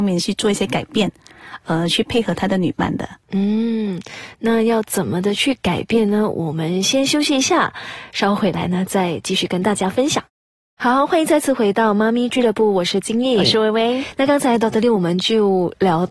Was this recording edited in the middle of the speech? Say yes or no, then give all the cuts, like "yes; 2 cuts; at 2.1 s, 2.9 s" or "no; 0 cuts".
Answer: no; 0 cuts